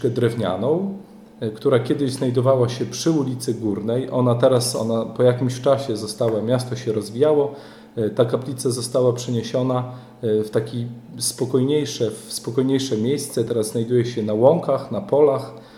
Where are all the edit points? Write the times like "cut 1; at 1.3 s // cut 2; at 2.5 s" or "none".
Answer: none